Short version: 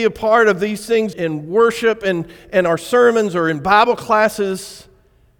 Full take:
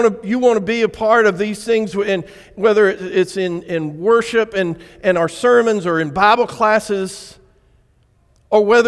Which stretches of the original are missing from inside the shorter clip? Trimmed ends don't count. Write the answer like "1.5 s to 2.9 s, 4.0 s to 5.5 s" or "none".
1.9 s to 3.6 s